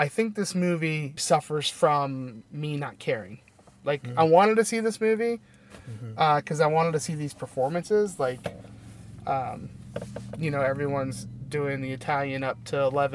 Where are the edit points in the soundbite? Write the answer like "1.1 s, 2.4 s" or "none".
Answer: 1.2 s